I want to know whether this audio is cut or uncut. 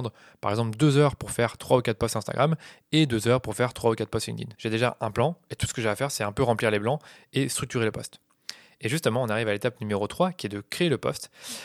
cut